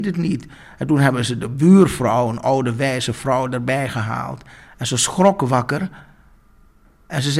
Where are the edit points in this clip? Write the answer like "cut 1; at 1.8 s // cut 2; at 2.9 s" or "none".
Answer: cut 1; at 4.7 s